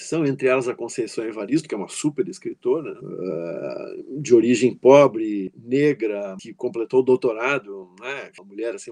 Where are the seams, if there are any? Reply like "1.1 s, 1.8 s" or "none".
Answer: none